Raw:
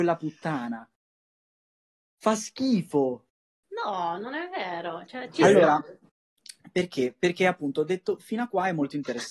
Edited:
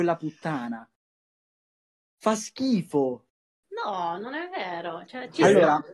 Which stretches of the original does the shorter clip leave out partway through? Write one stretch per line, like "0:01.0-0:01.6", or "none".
none